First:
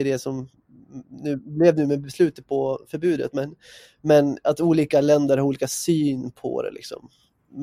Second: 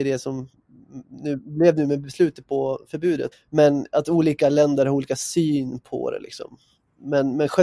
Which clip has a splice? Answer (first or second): second